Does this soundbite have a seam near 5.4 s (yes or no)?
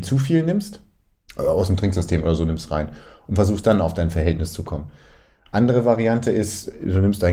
no